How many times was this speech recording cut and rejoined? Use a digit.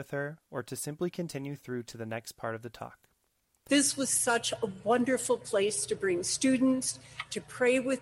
1